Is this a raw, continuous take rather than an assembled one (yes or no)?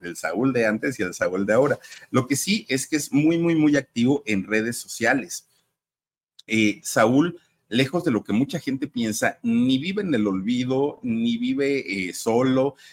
yes